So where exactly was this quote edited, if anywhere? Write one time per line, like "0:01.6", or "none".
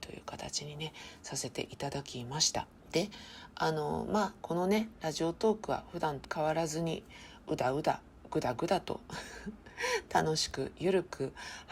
0:04.4